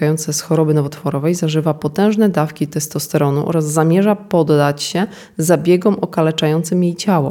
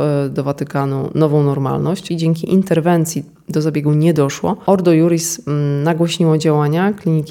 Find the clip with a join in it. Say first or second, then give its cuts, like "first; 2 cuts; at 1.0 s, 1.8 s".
second; 1 cut; at 2.1 s